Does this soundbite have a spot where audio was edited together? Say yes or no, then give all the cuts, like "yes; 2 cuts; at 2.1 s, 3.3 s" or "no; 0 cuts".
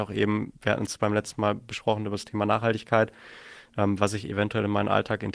no; 0 cuts